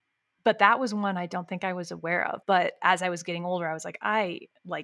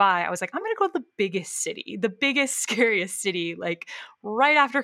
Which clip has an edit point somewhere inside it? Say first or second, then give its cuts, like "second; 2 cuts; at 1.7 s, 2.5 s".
first; 1 cut; at 2.4 s